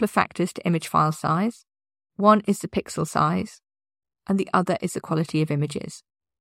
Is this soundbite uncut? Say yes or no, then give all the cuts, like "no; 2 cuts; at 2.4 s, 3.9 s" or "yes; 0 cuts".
yes; 0 cuts